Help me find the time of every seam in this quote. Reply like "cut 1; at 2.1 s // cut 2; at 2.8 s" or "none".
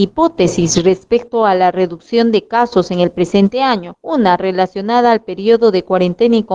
none